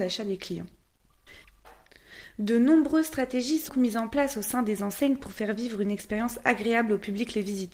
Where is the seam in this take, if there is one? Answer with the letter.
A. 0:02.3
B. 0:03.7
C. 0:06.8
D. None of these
B